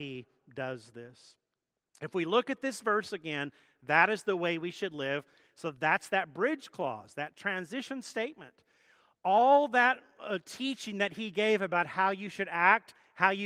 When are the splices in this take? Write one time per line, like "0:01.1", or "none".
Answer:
none